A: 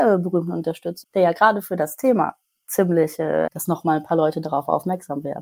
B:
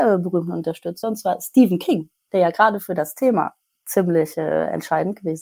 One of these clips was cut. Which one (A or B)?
A